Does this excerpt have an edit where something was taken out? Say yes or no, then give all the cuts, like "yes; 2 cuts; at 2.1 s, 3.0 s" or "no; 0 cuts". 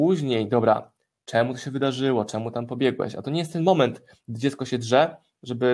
no; 0 cuts